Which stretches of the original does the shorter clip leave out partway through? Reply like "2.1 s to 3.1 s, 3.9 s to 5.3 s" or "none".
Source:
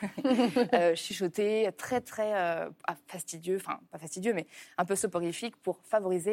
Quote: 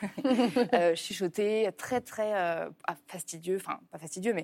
none